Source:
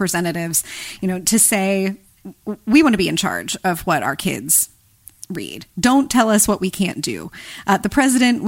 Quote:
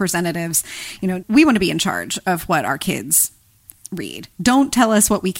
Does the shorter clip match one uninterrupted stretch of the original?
no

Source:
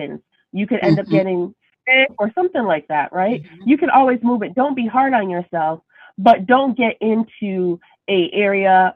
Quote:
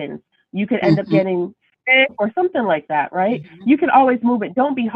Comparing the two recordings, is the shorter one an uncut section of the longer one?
yes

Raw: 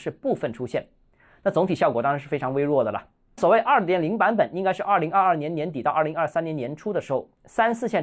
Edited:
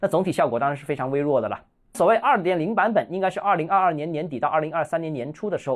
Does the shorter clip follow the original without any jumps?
yes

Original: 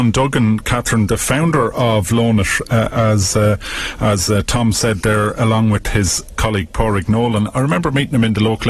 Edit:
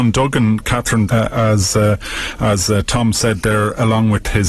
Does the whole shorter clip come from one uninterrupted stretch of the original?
no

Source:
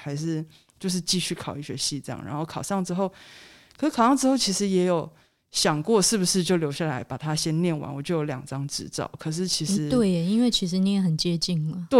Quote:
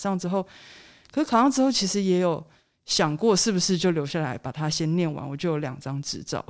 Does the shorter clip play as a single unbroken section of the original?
yes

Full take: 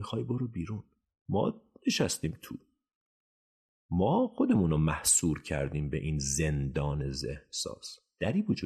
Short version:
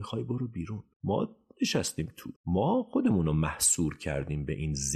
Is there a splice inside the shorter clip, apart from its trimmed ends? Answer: yes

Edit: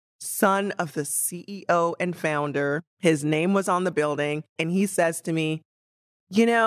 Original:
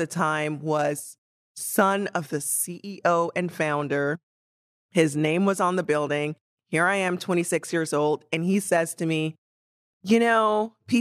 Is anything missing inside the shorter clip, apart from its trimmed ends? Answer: yes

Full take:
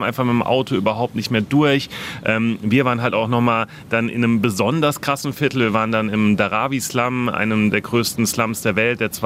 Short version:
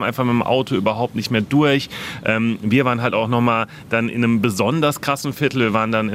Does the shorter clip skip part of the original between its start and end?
no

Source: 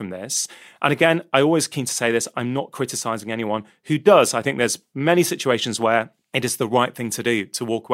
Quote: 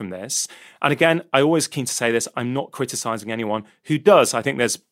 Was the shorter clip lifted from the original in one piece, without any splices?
yes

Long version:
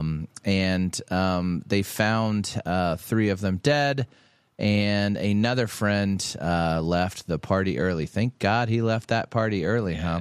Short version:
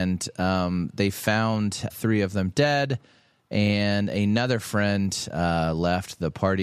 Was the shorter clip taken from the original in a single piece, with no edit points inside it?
no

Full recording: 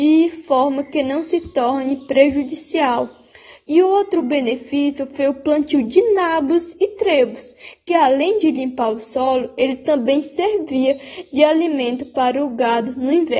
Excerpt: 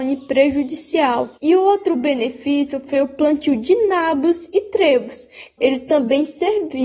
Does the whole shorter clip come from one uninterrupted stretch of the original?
no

